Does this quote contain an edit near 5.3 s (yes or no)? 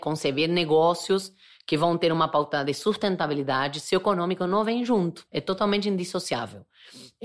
yes